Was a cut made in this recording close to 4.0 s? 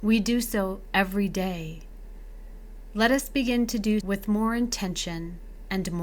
yes; 1 cut; at 4.0 s

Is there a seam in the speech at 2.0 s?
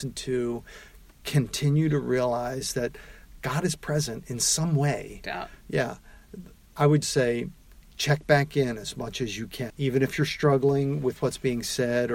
no; 3 cuts; at 5.2 s, 7.0 s, 9.7 s

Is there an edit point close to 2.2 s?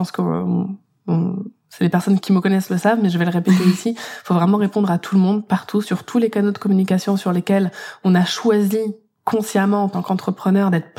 yes; 1 cut; at 2.2 s

